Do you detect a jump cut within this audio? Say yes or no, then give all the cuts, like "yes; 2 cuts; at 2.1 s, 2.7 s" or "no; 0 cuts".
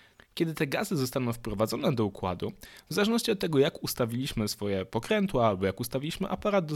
no; 0 cuts